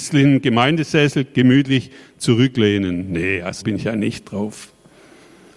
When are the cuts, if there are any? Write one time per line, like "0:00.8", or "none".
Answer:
0:03.6